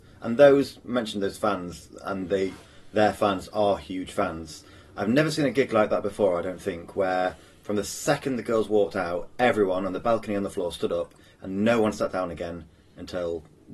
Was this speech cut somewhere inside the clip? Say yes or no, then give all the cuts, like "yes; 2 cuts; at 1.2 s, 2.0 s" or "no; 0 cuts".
no; 0 cuts